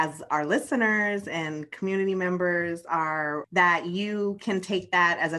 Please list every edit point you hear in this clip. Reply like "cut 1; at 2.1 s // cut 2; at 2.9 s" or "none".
cut 1; at 3.4 s